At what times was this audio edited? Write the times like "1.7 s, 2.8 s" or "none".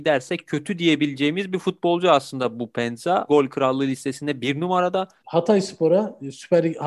3.3 s, 5.2 s